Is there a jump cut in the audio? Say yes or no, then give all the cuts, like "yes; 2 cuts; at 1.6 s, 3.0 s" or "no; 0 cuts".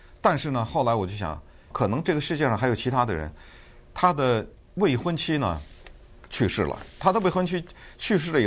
yes; 1 cut; at 1.7 s